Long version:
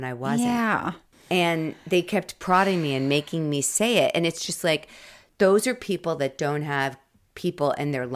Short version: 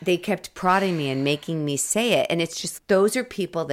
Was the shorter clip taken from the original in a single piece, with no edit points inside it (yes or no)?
no